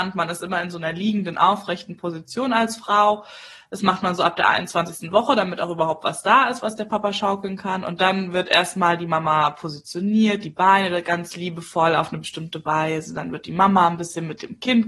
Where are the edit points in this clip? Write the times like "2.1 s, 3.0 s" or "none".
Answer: none